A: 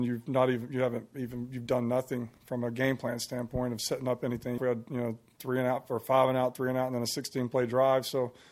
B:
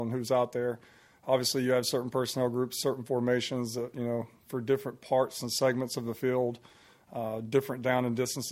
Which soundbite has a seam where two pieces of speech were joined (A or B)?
A